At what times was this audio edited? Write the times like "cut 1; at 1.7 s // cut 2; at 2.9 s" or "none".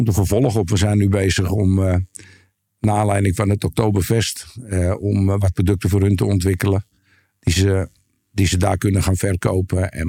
none